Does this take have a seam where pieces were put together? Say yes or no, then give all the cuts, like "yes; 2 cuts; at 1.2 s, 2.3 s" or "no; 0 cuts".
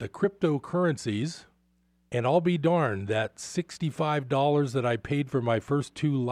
yes; 1 cut; at 2.1 s